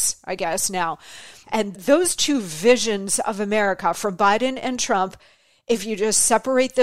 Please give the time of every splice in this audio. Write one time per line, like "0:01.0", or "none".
0:01.4